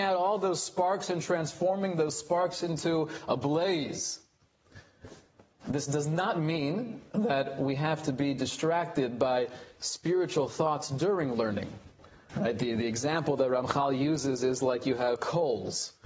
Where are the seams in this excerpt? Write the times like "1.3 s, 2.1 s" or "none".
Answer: 5.6 s, 12.3 s, 15.2 s